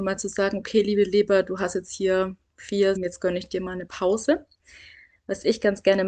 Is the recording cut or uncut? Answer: cut